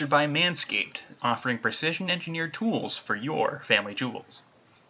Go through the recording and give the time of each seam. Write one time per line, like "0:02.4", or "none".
0:01.2

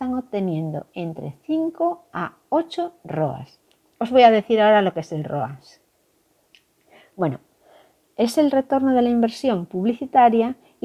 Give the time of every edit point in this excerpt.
none

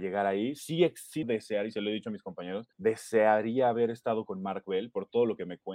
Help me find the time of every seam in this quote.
0:01.2
0:02.7

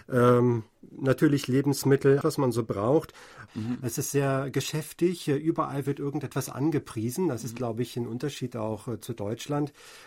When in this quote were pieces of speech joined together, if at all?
0:02.2
0:03.5

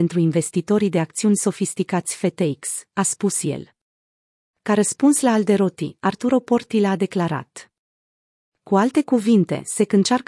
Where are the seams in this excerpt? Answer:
0:02.9

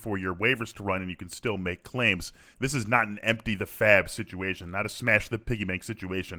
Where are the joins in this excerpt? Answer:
0:02.5

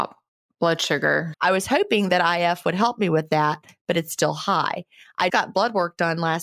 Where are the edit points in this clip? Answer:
0:01.3
0:05.3

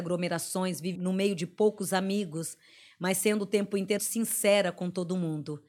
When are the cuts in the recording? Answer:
0:00.9
0:04.0

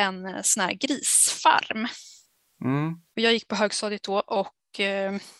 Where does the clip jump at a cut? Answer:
0:03.1

